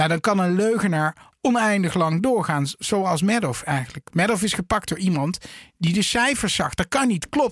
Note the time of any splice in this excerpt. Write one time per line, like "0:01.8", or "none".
none